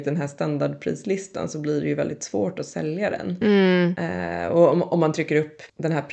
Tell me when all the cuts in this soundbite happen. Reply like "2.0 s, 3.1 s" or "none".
none